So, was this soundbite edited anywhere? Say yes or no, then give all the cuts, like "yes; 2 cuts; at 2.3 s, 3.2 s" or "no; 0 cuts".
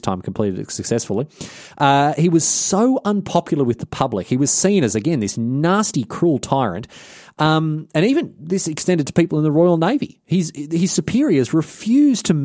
no; 0 cuts